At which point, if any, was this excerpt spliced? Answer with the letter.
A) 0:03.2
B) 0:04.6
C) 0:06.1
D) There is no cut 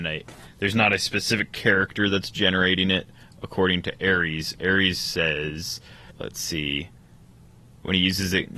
C